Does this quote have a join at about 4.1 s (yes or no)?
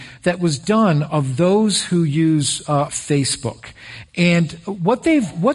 no